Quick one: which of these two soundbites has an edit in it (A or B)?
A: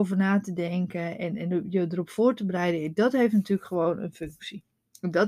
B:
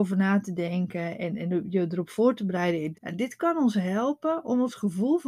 B